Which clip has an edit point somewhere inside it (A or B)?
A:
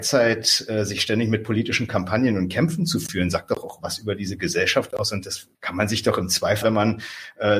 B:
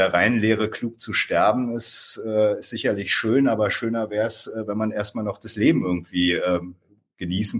A